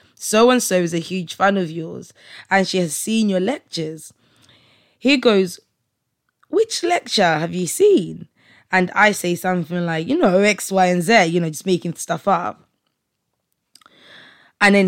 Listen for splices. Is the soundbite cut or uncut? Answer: uncut